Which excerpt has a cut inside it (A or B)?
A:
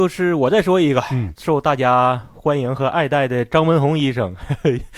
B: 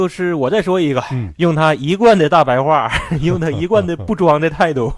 B